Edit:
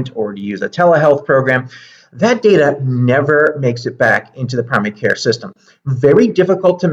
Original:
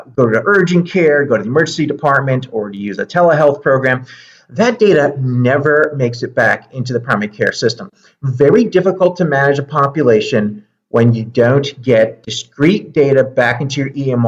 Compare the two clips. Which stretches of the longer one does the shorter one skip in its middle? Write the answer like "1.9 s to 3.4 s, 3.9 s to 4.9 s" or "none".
none